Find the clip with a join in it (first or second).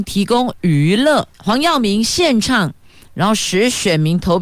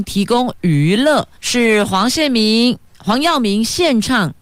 first